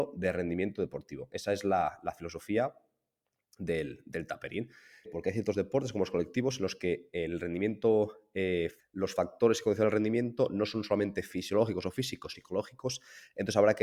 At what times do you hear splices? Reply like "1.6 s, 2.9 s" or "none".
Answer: 5.0 s, 8.8 s, 12.3 s